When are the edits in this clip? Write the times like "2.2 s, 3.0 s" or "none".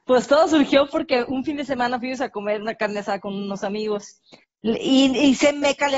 4.4 s

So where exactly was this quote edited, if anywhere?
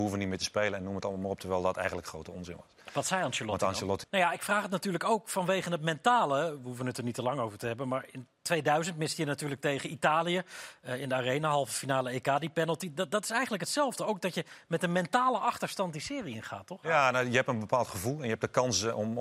4.0 s

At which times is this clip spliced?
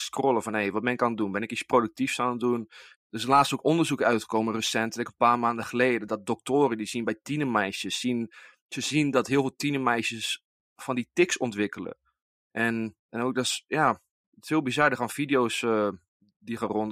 2.9 s

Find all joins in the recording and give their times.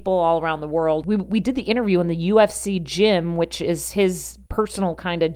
1.0 s

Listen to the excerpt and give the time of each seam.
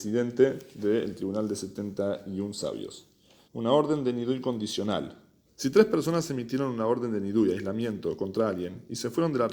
3.5 s, 5.5 s

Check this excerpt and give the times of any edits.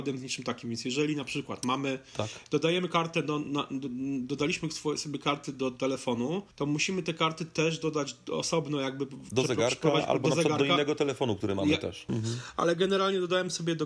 6.5 s, 12.1 s

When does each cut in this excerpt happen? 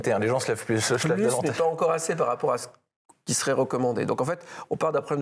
none

